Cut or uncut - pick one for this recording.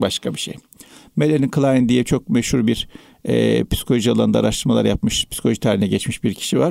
uncut